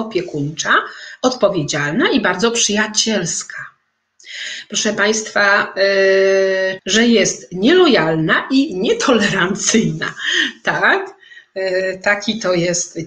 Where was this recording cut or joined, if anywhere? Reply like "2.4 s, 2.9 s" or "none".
6.8 s